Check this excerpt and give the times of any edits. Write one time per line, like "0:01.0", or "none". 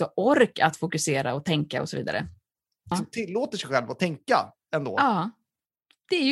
0:02.9